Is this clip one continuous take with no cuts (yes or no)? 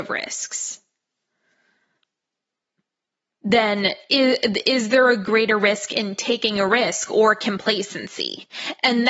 yes